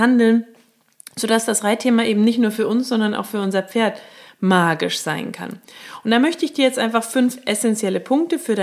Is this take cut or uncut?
uncut